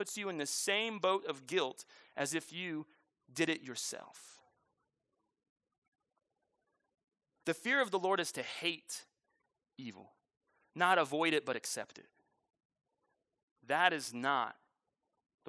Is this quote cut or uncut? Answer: uncut